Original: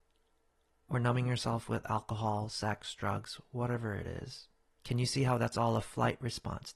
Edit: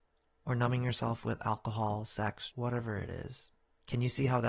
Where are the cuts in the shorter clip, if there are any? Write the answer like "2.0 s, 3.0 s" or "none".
2.5 s

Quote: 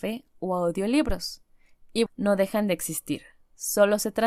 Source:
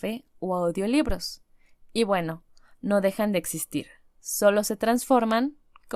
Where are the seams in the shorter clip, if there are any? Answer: 2.1 s

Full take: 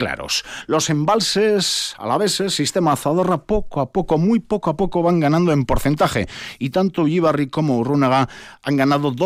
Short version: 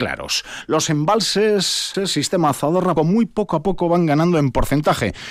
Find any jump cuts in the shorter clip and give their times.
1.9 s, 3.0 s

